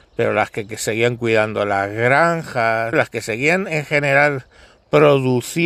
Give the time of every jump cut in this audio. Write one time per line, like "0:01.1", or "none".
0:02.9

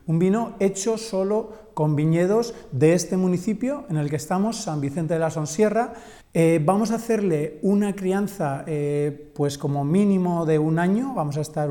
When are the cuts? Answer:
0:06.2

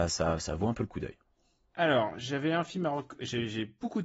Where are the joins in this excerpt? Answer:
none

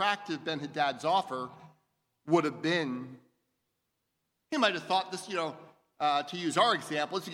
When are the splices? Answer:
0:04.4

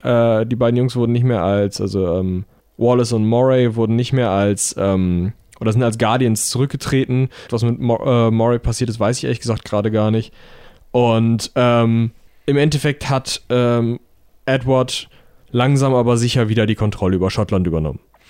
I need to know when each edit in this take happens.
0:07.5

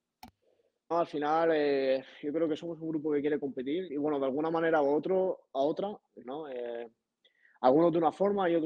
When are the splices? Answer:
0:00.9
0:03.9
0:06.2

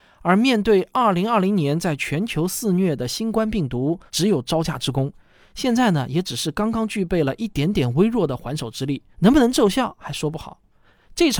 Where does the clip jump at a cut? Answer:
0:04.1
0:09.1

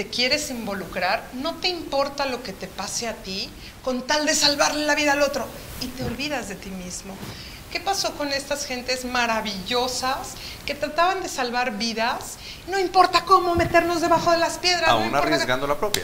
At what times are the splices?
0:07.6

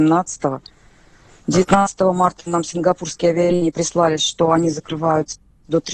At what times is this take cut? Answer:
none

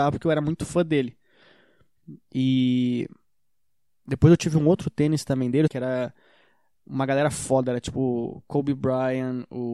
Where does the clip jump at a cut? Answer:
0:05.7

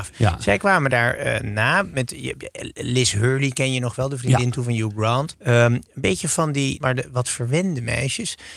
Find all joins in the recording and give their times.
0:05.3
0:06.8

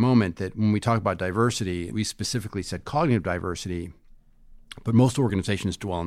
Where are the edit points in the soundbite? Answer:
none

